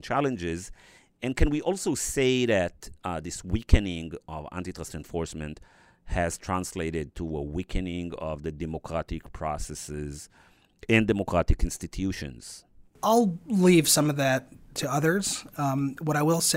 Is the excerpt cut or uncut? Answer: uncut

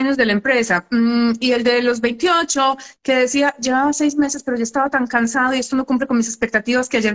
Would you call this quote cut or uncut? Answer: uncut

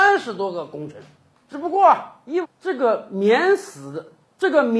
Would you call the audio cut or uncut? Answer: cut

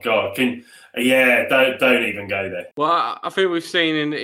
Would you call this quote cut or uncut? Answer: cut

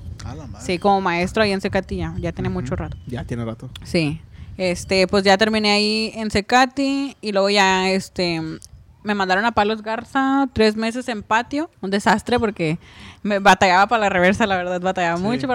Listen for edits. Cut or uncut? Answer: cut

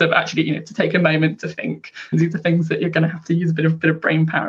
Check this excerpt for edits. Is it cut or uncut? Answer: cut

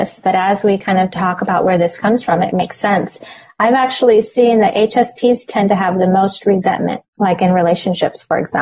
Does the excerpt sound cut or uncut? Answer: cut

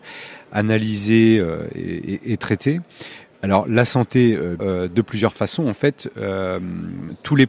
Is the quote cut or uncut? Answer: cut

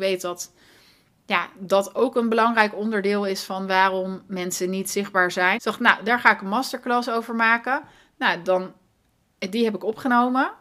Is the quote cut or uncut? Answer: cut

